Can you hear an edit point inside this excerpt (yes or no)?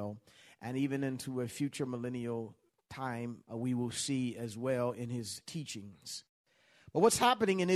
yes